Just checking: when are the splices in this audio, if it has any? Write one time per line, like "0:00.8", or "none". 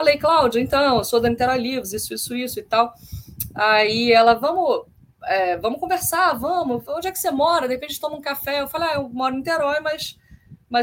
none